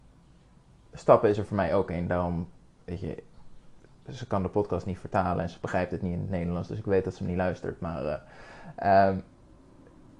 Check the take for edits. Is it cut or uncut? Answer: uncut